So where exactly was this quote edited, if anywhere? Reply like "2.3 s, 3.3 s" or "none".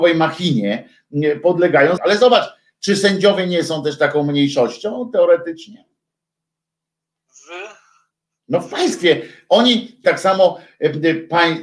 2.0 s, 10.0 s

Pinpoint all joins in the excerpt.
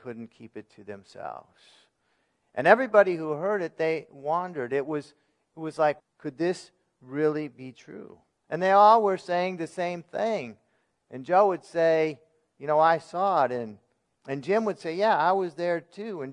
6.0 s, 8.4 s

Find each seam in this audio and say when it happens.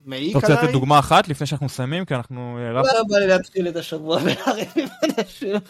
2.9 s

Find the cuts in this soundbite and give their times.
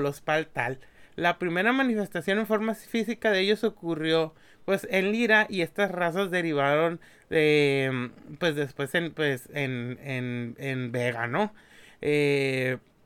none

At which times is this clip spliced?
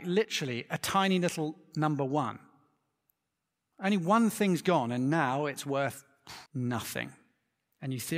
6.5 s

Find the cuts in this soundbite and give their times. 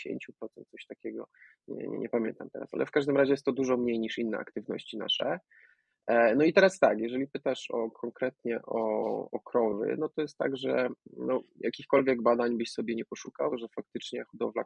13.5 s

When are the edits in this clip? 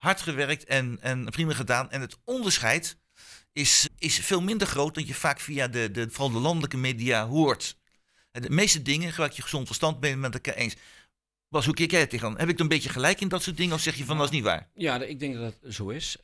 3.9 s, 6.1 s

